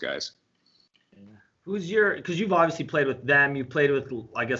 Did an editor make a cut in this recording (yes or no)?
no